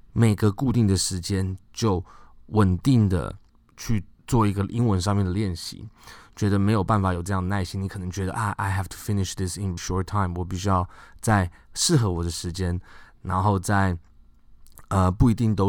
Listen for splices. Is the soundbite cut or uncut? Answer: cut